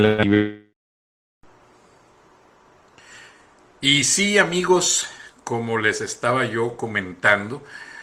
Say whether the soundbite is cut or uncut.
uncut